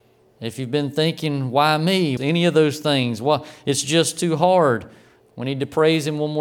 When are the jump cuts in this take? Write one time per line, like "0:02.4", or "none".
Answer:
0:02.2
0:05.2